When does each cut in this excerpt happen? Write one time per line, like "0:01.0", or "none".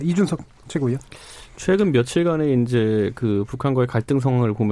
none